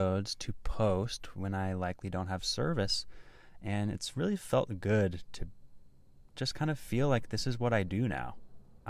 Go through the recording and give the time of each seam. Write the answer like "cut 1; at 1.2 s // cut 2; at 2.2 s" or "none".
none